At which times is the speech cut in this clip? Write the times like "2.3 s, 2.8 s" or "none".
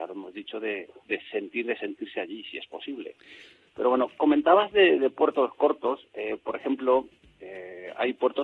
3.7 s

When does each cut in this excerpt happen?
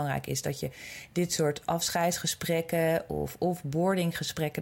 none

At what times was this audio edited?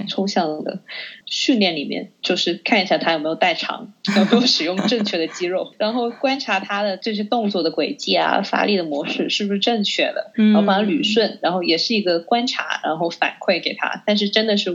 1.2 s

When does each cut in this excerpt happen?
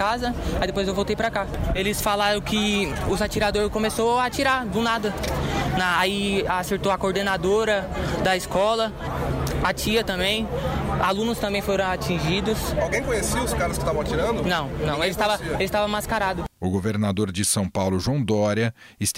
none

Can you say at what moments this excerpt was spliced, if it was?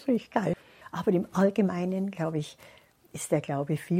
none

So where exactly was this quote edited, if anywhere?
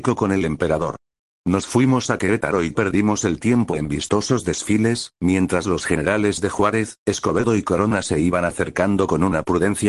5.1 s

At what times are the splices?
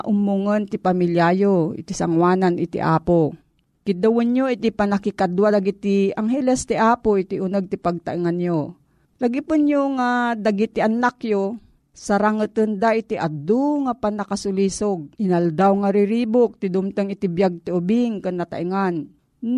15.2 s

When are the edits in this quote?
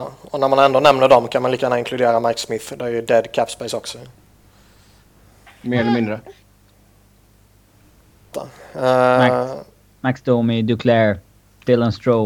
8.3 s

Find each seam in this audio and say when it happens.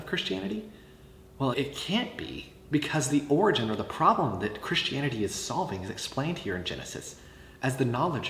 1.5 s

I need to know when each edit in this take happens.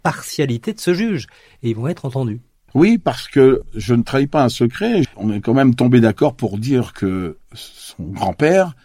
5.0 s

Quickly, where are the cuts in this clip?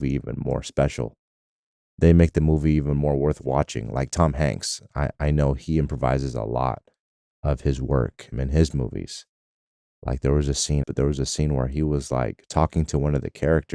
8.3 s, 10.8 s

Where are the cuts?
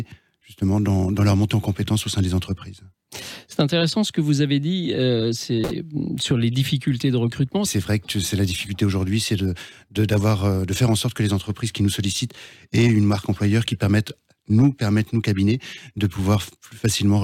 7.7 s

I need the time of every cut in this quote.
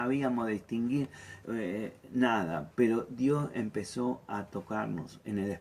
1.4 s, 2.7 s

